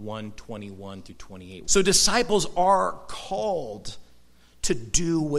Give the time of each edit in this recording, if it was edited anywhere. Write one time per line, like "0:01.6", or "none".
0:01.6